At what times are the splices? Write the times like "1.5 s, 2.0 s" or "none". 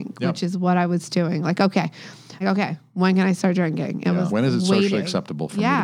2.4 s, 4.3 s